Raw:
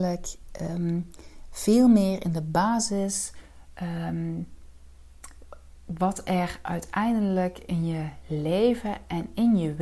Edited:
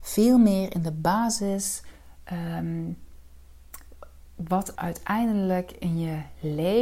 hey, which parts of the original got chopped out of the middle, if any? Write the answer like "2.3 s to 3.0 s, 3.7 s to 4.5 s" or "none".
6.3 s to 6.6 s